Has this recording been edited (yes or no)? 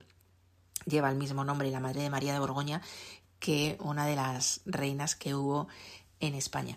no